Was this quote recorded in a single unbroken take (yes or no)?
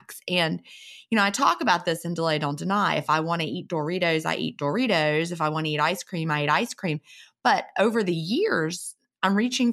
yes